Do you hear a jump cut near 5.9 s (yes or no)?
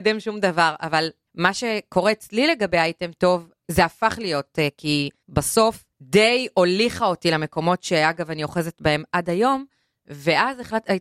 yes